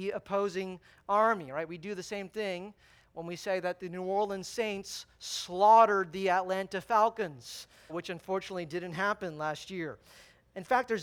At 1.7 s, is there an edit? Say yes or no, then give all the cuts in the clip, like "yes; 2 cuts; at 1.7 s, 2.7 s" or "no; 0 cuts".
no; 1 cut; at 7.9 s